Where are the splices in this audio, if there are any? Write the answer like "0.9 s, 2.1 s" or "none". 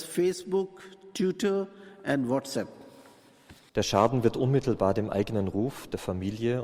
3.7 s